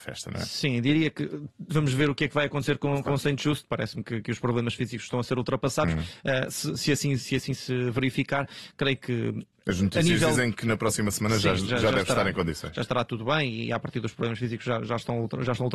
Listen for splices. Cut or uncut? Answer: uncut